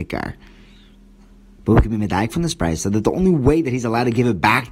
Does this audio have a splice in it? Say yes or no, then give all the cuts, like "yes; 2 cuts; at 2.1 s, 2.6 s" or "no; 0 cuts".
no; 0 cuts